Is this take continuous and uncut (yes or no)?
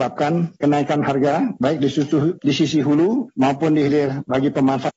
yes